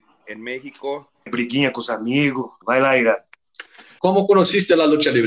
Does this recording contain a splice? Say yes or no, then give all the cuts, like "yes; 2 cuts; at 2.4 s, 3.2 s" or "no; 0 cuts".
yes; 3 cuts; at 1.3 s, 2.6 s, 4.0 s